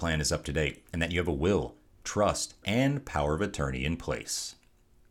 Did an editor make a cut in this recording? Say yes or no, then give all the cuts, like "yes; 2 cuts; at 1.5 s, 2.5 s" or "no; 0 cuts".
yes; 1 cut; at 2.6 s